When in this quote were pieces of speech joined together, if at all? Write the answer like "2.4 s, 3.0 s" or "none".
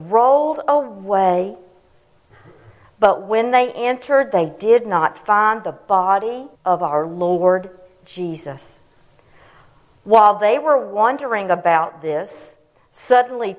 6.5 s

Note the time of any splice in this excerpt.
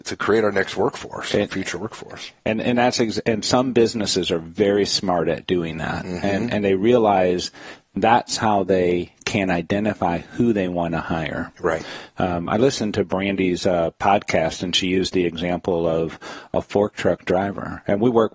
none

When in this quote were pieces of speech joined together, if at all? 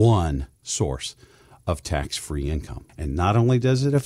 2.9 s

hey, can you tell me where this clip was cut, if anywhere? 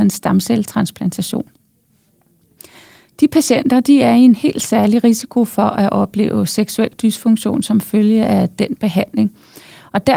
none

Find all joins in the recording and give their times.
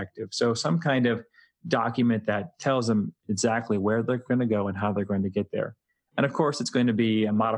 none

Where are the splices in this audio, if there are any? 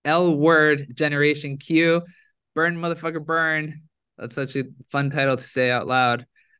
2.4 s

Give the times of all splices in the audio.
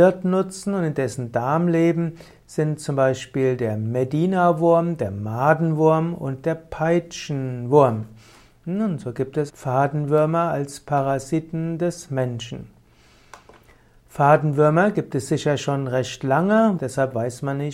9.5 s, 16.8 s

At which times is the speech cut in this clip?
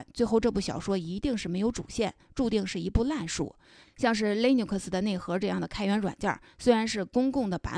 3.8 s

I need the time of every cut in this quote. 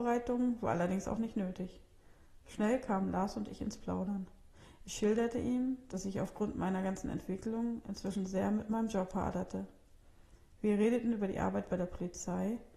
none

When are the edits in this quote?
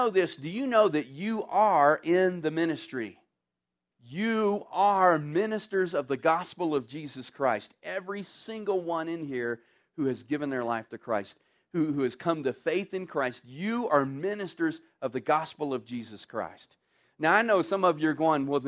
3.9 s

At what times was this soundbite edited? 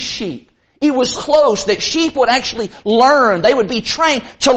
1.1 s

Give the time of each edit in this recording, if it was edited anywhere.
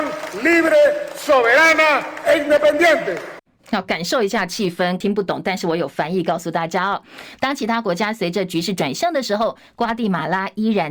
7.4 s

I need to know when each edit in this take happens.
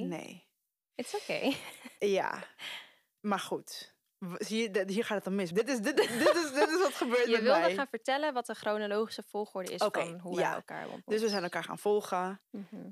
5.5 s

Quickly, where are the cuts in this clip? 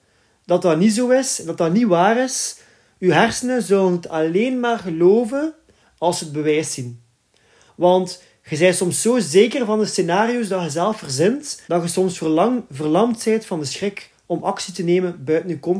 7.7 s, 11.6 s

